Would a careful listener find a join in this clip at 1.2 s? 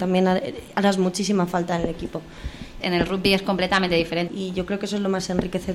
no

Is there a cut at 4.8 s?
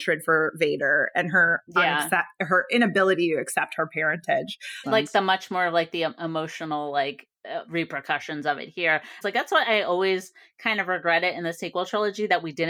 yes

